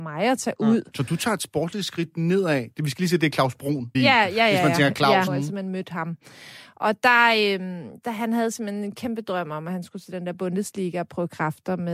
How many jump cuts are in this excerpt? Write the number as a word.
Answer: two